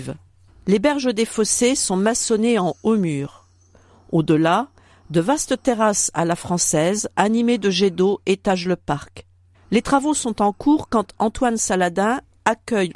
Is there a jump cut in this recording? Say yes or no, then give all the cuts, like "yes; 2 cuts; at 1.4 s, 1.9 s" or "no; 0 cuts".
no; 0 cuts